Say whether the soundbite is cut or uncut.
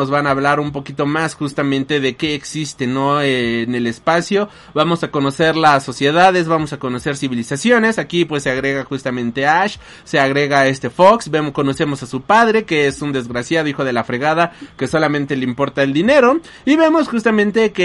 uncut